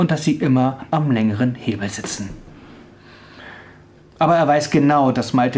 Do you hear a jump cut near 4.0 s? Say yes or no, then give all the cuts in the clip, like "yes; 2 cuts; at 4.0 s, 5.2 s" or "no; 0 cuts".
yes; 1 cut; at 4.0 s